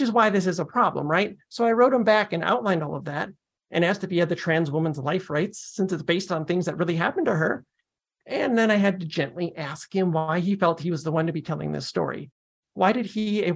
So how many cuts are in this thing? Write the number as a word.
zero